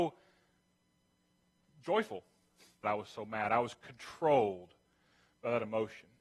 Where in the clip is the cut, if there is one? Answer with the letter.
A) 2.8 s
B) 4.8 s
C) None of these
A